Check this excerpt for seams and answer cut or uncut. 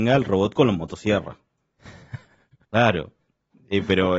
cut